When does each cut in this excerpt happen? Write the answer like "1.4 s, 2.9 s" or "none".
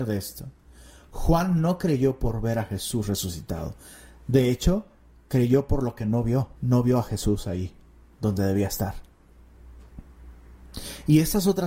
6.5 s

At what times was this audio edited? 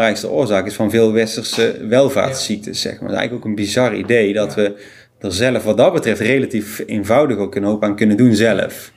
none

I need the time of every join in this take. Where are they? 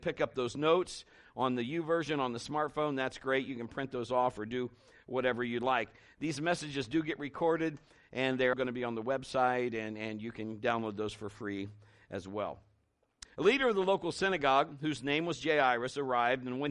8.5 s, 13.2 s

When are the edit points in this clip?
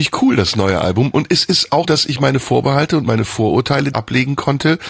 1.8 s, 3.9 s

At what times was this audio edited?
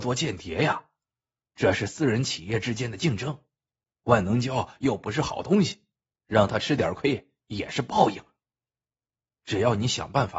9.4 s

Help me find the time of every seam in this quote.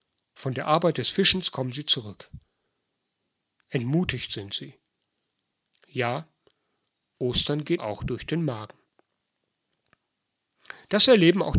3.6 s, 5.7 s, 7.8 s

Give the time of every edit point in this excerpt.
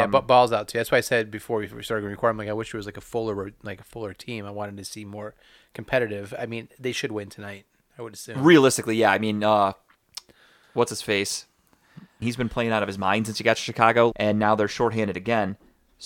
12.2 s, 14.1 s

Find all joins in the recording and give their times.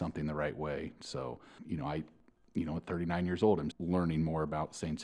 1.6 s, 3.7 s

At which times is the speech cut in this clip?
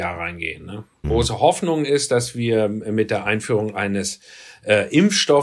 1.0 s

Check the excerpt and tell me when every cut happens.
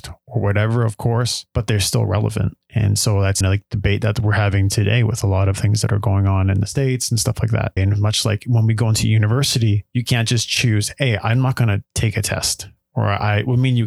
3.4 s, 7.8 s

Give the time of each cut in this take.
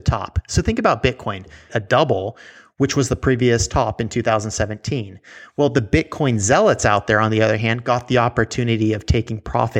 1.7 s

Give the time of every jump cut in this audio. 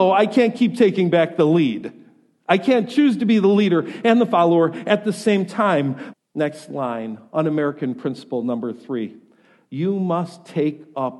6.1 s

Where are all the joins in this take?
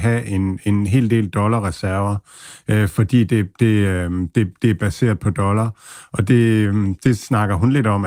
7.0 s

